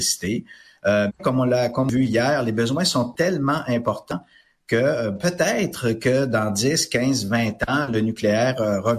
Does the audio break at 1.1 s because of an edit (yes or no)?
yes